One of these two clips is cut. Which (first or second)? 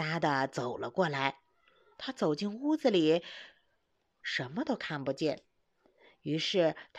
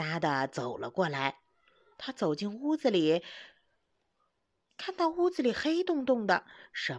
first